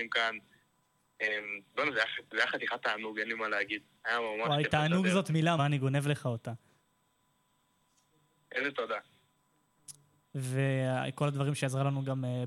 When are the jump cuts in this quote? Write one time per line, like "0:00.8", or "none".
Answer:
0:05.6
0:10.2